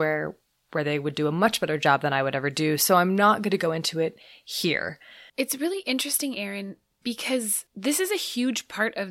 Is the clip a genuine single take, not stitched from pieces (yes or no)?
no